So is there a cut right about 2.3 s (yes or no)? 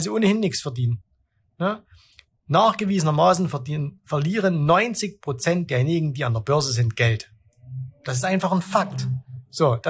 no